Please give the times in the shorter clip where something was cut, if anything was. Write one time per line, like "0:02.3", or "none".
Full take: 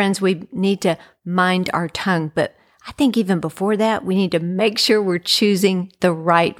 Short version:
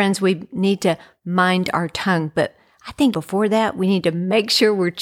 0:03.1